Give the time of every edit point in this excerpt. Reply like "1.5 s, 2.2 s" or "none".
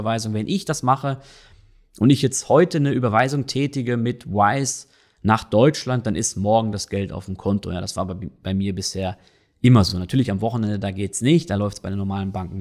none